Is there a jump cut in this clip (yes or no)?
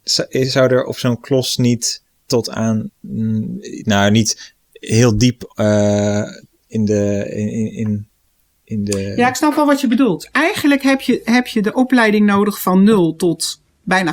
no